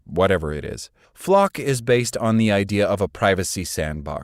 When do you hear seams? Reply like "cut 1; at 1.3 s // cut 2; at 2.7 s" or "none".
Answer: cut 1; at 1.0 s